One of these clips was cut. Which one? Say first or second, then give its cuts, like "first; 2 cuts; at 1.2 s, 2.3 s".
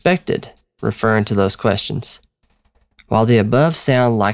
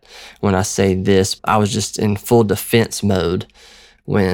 second; 1 cut; at 1.4 s